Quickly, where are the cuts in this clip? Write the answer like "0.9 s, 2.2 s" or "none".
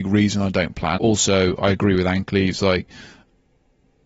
1.0 s